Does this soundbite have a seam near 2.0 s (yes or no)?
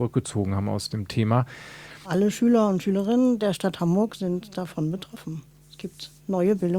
yes